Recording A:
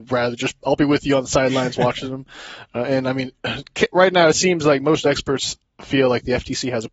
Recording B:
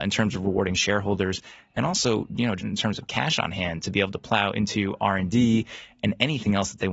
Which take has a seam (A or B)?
B